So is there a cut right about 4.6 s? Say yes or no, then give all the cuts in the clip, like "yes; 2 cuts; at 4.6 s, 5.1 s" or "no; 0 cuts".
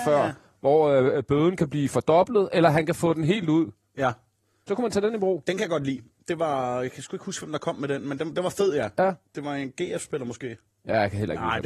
no; 0 cuts